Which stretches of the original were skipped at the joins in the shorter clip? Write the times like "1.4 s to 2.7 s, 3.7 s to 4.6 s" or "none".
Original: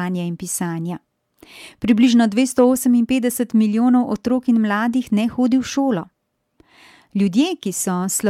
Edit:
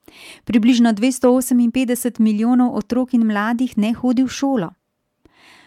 none